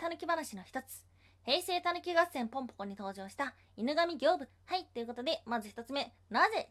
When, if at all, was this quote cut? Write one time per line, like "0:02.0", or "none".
0:04.5

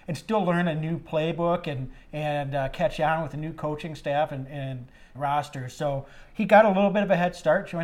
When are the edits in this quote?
0:05.1
0:06.2

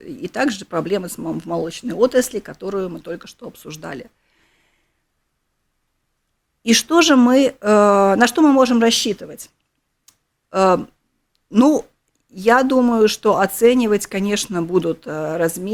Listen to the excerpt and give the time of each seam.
none

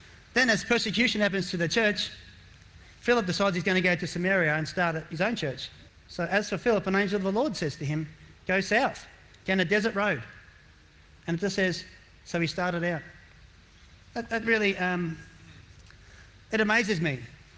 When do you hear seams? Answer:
0:05.9

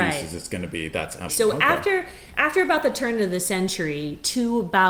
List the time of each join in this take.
0:01.3

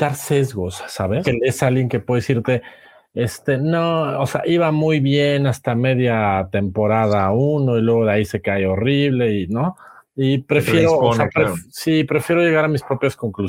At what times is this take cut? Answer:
0:01.2

